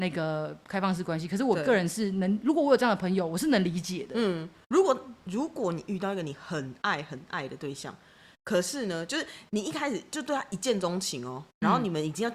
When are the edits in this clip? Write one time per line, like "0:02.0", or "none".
none